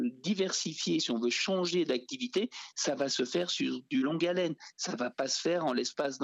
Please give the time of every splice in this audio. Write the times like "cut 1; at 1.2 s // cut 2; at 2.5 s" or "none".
none